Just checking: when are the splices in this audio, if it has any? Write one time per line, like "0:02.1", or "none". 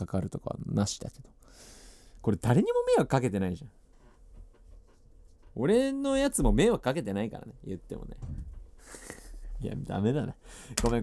none